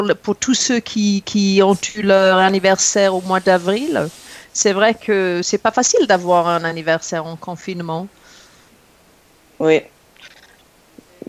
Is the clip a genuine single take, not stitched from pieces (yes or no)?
yes